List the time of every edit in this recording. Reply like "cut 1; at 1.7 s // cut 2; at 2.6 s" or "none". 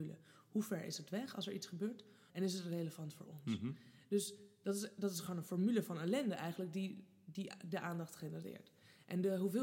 cut 1; at 2.3 s